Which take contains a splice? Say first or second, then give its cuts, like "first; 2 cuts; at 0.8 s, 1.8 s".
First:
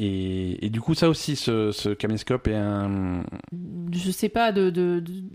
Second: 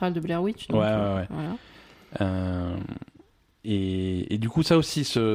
first; 1 cut; at 3.5 s